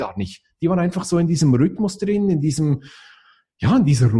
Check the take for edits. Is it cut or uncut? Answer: uncut